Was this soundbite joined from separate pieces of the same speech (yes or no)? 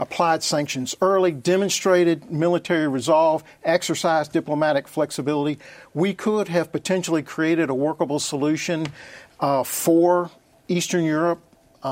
no